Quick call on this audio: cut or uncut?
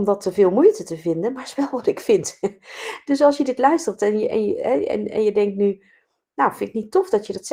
uncut